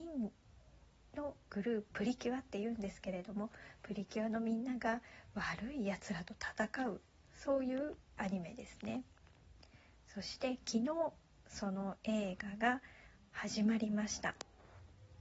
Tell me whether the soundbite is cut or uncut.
cut